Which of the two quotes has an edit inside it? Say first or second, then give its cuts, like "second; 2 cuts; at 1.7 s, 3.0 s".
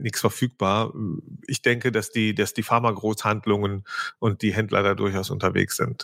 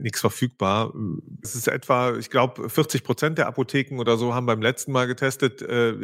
second; 1 cut; at 1.4 s